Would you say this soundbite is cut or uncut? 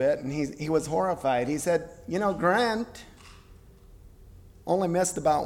uncut